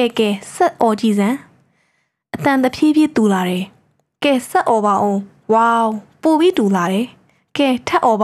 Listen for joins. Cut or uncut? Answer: uncut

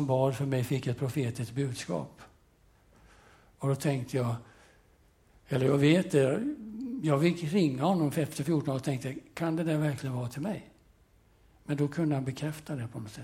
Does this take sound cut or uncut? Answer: uncut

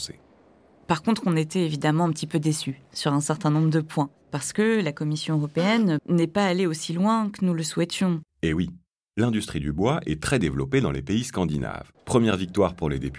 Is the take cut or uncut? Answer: cut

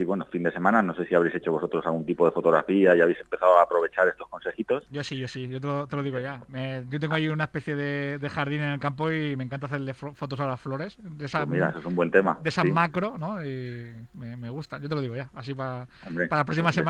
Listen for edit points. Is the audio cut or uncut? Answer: uncut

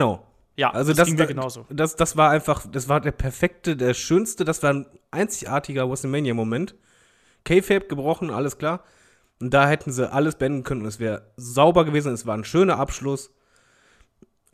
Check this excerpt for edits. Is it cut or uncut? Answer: uncut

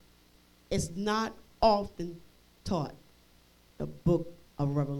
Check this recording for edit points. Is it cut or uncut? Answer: uncut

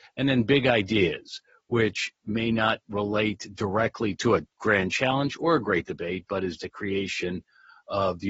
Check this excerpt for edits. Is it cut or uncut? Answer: cut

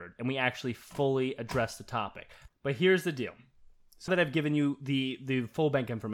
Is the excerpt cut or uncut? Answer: cut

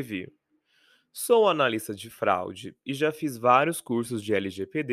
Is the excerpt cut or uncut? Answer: uncut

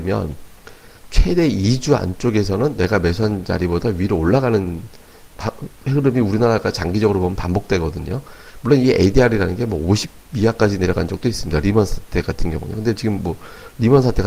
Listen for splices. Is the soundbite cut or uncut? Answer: uncut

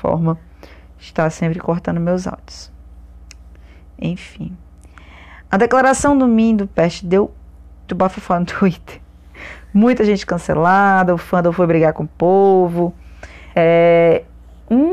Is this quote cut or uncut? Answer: cut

